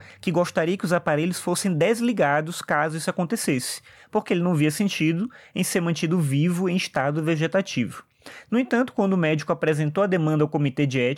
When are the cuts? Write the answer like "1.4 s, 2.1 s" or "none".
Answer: none